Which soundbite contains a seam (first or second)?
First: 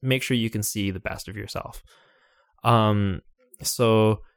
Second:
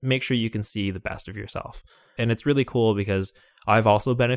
second